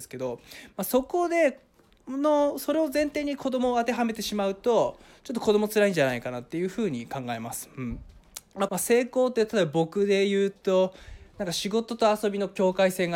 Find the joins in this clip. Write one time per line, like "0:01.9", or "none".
0:08.7